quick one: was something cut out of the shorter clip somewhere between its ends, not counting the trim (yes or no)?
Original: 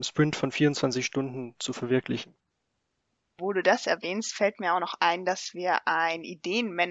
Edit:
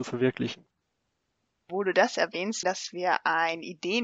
yes